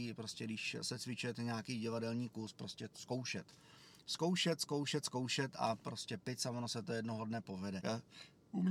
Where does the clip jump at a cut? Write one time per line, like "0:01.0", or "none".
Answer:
0:07.8